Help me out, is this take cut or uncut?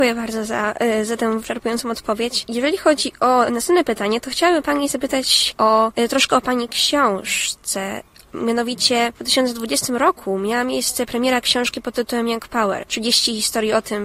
uncut